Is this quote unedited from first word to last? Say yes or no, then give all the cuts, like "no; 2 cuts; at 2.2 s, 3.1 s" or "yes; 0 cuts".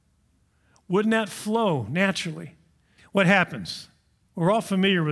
no; 1 cut; at 3.0 s